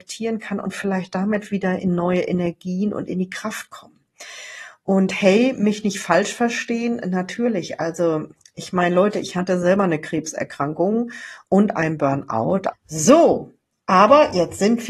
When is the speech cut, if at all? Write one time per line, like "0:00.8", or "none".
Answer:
0:12.7